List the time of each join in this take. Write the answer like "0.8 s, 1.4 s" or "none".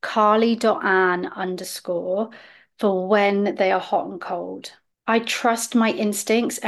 4.9 s